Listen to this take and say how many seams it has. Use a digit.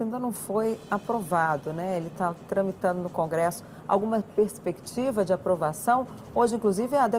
0